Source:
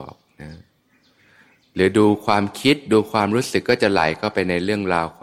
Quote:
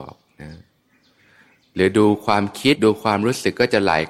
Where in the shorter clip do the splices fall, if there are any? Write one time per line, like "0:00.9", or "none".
0:02.7